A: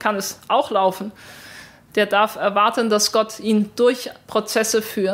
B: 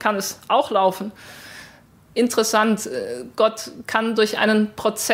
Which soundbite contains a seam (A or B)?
A